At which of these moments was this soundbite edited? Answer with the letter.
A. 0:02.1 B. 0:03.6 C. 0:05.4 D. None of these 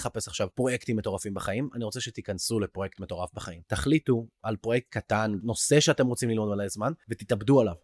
C